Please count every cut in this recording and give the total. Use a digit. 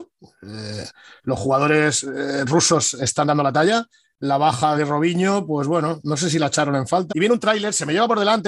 2